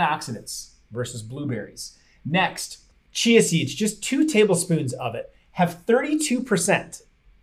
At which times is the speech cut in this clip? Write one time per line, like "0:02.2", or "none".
none